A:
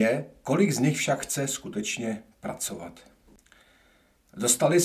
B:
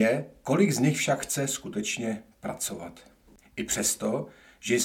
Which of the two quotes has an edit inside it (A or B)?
B